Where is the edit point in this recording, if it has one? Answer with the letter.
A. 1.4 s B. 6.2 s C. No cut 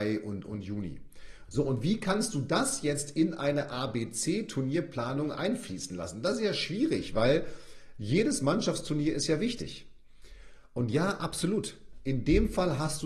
A